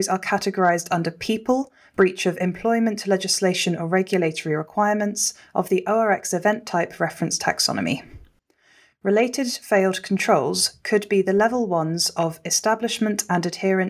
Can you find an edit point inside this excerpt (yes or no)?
no